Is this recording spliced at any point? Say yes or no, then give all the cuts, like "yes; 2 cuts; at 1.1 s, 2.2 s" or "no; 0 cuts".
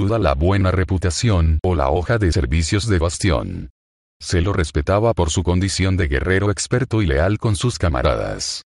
no; 0 cuts